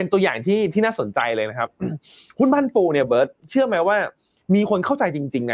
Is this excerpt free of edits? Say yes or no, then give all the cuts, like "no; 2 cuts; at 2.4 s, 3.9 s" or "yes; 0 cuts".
yes; 0 cuts